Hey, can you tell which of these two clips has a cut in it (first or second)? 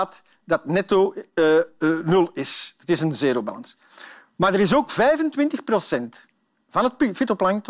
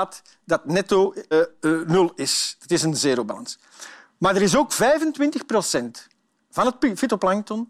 second